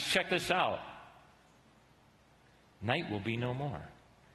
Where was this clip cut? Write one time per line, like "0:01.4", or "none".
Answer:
none